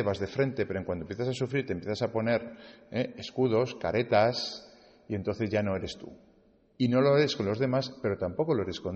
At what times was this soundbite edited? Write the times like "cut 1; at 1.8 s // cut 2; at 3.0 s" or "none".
none